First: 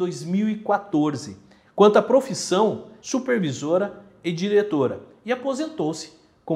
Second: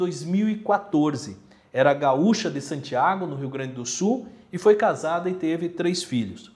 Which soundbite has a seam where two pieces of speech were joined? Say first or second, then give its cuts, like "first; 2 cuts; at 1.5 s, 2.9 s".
first; 2 cuts; at 1.7 s, 3.0 s